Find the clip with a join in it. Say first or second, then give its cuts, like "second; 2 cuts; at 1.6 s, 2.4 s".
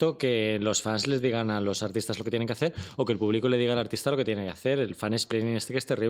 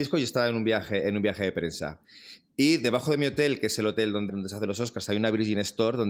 second; 1 cut; at 4.3 s